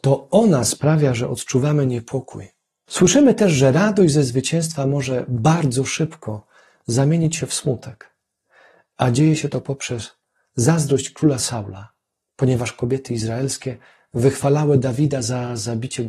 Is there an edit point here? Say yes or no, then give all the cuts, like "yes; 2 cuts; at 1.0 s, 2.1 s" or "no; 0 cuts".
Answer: yes; 1 cut; at 2.9 s